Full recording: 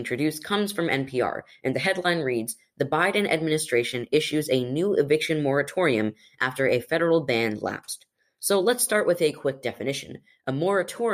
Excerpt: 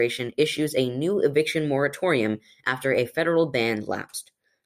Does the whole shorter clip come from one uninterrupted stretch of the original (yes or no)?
yes